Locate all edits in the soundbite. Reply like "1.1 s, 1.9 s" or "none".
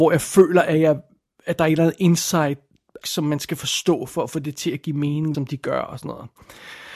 3.0 s, 5.3 s